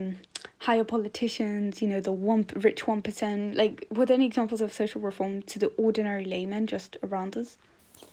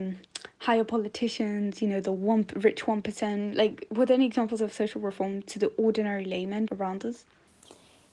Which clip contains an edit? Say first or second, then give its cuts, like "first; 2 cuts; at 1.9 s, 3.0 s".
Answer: second; 1 cut; at 6.7 s